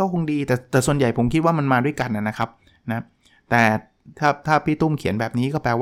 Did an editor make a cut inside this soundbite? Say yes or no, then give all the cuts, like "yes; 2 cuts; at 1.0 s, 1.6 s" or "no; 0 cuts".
no; 0 cuts